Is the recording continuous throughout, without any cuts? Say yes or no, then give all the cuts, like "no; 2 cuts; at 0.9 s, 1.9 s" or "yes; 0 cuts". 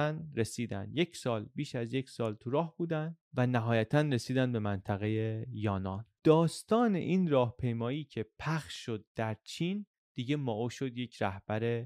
no; 1 cut; at 3.2 s